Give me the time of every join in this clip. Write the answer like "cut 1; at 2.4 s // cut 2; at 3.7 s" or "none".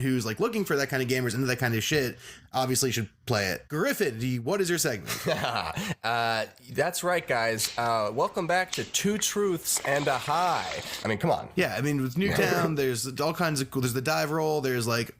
cut 1; at 3.7 s // cut 2; at 11.0 s